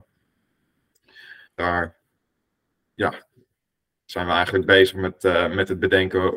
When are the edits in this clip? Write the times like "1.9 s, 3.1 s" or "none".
1.5 s